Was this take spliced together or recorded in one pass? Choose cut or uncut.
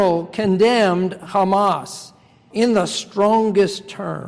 cut